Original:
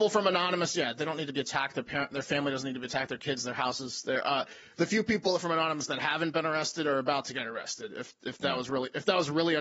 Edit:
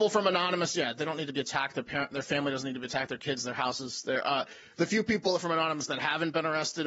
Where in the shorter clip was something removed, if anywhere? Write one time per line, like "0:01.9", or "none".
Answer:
none

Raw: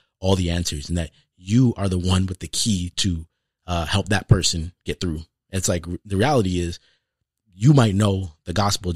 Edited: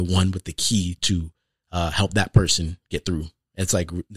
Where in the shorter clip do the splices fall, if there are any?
none

